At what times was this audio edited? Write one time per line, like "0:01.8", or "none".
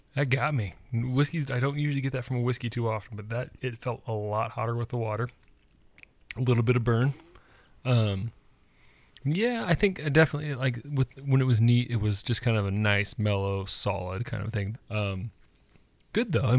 0:14.7